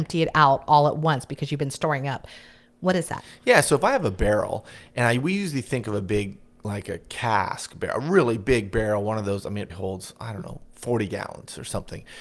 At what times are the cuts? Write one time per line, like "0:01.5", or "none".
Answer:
0:09.7